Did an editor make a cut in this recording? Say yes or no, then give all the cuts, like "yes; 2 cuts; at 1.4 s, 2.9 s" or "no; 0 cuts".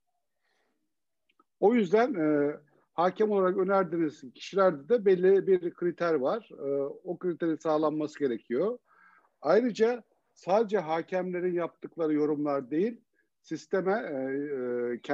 no; 0 cuts